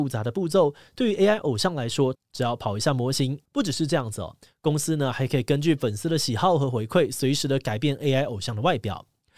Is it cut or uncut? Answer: cut